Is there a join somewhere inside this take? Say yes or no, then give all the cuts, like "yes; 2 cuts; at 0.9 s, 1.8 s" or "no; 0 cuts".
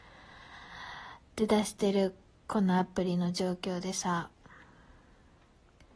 no; 0 cuts